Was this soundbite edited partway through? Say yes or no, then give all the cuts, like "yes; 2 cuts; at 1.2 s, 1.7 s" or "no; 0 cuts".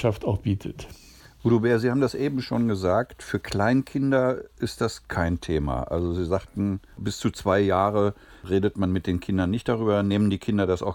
no; 0 cuts